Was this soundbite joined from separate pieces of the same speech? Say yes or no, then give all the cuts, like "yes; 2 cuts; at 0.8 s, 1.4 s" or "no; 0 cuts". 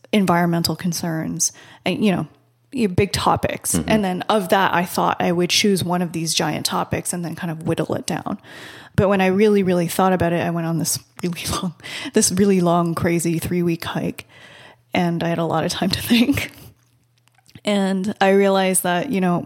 no; 0 cuts